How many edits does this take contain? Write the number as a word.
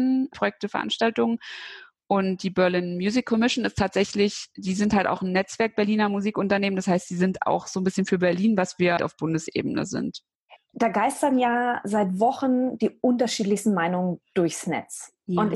two